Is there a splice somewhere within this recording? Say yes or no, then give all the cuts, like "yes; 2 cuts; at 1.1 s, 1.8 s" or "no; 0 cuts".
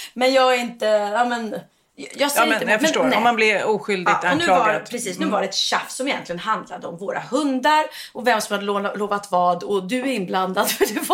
no; 0 cuts